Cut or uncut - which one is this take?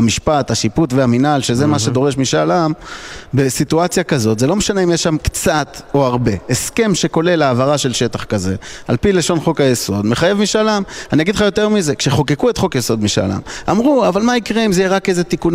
uncut